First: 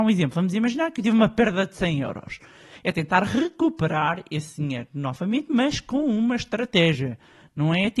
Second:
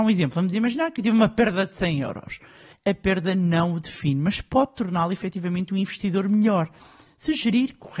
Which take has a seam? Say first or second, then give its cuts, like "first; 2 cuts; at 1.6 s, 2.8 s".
second; 1 cut; at 2.7 s